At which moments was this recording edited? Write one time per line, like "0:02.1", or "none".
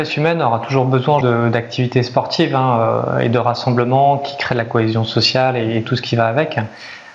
0:01.2